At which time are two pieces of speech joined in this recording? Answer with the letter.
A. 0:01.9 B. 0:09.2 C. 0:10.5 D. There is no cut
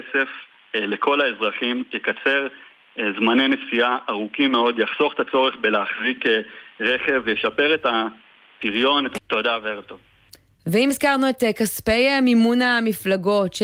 B